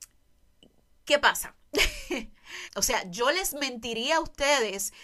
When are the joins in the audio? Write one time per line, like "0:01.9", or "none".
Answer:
0:02.6